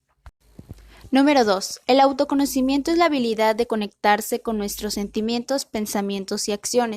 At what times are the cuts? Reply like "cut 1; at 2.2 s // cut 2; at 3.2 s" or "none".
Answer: none